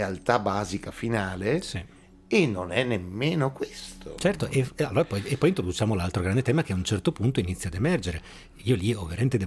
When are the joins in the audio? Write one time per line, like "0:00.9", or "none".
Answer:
none